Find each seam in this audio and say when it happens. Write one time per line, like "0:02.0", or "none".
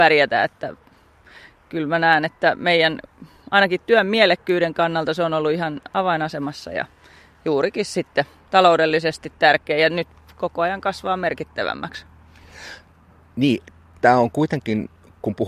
none